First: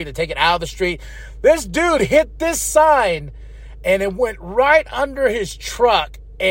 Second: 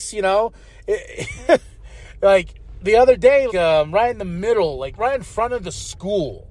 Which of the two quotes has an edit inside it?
second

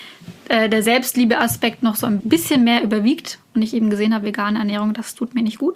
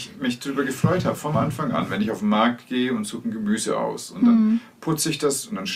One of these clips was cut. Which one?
first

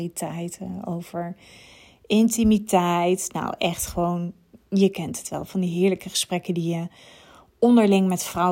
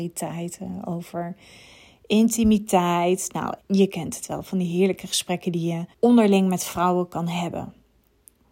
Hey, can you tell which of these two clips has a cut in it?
second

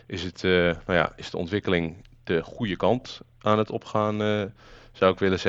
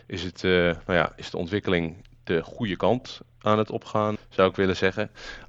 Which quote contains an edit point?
second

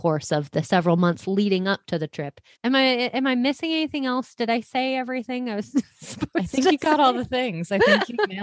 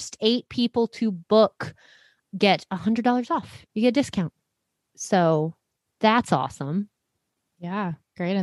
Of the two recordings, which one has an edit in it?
first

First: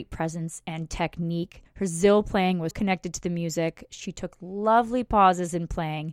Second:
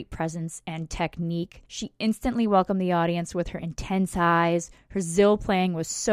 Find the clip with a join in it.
first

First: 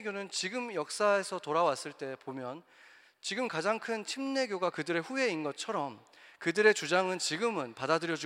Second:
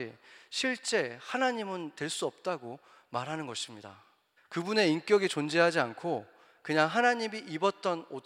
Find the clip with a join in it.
second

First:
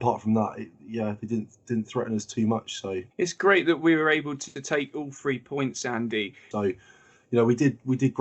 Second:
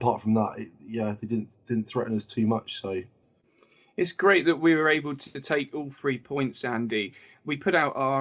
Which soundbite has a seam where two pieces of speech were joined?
first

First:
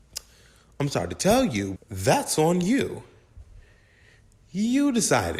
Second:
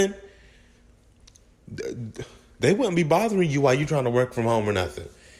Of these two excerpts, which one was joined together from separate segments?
first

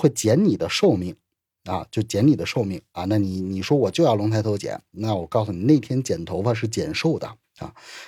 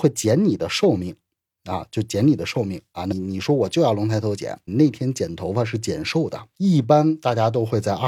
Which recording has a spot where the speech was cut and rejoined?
second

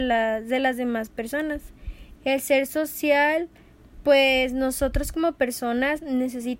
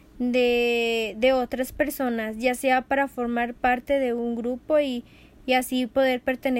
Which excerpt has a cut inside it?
first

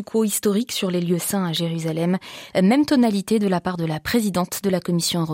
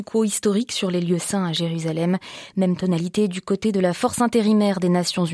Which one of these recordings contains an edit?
first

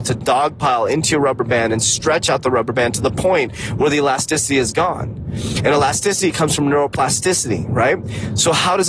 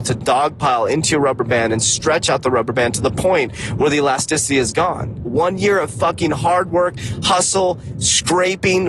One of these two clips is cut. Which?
second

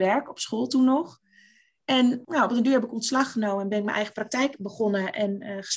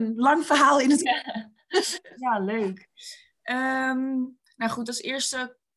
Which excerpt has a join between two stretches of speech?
first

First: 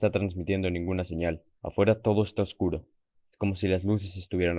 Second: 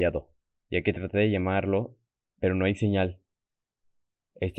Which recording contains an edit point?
first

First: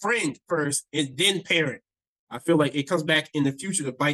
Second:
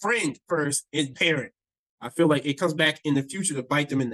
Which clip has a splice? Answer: second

